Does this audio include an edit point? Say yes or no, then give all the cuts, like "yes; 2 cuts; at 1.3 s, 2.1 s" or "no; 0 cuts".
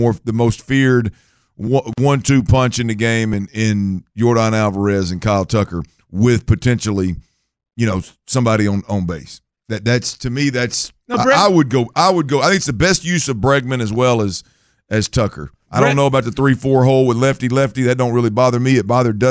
no; 0 cuts